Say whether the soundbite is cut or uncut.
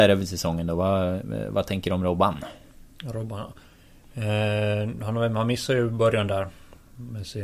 uncut